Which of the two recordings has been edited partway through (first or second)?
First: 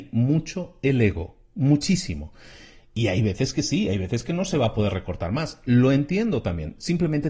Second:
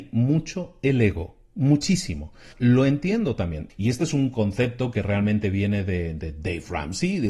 second